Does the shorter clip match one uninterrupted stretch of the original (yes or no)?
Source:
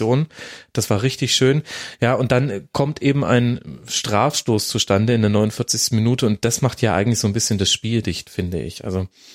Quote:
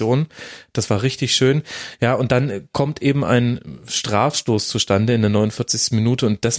yes